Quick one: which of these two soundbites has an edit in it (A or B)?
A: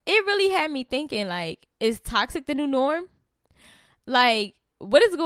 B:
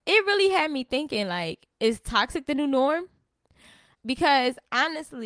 B